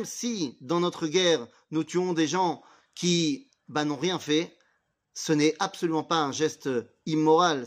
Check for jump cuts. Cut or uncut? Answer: uncut